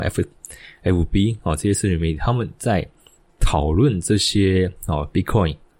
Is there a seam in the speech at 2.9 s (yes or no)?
no